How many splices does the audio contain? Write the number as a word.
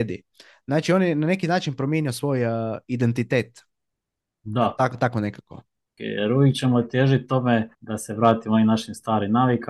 two